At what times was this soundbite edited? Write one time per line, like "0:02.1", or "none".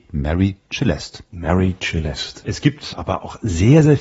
0:01.3
0:02.4